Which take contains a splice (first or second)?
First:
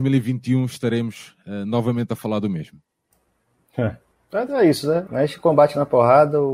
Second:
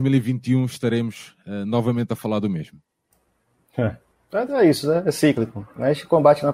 first